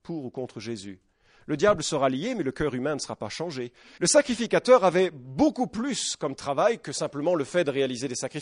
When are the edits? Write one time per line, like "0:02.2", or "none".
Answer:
0:04.0